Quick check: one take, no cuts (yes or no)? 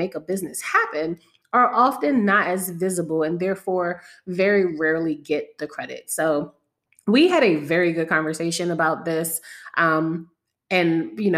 yes